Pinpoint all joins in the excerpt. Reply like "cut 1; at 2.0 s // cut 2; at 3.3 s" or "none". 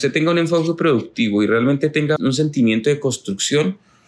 cut 1; at 2.2 s

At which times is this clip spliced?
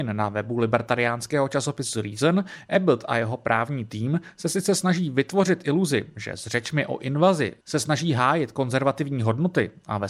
none

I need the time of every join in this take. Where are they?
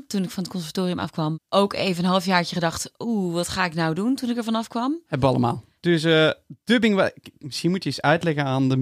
cut 1; at 5.8 s

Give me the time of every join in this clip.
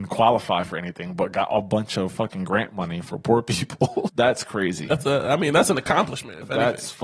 cut 1; at 4.1 s

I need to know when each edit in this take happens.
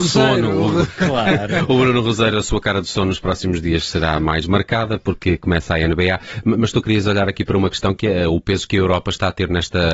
none

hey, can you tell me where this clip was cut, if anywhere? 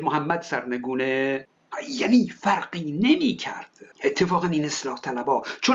cut 1; at 3.9 s

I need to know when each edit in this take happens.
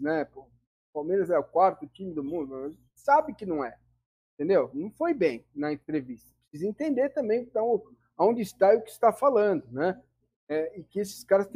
none

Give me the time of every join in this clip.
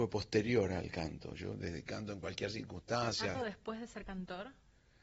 cut 1; at 1.9 s // cut 2; at 3.3 s

